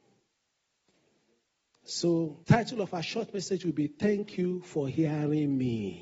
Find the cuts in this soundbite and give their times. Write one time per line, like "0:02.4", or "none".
0:02.4